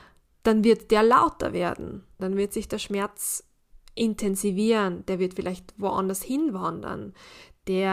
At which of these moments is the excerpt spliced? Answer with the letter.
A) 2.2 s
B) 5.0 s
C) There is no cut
A